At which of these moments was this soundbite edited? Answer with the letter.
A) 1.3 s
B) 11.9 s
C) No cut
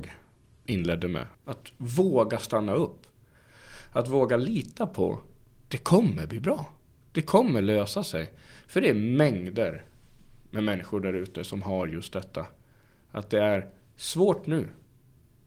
A